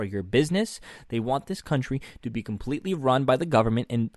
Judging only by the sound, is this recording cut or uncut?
uncut